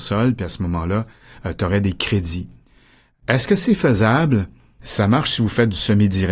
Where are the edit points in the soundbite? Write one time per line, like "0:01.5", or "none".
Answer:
0:04.8